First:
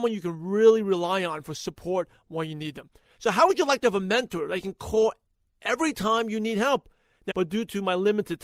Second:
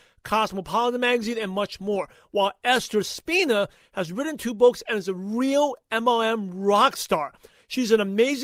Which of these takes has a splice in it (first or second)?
first